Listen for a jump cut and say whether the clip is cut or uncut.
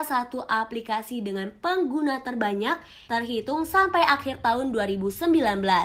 cut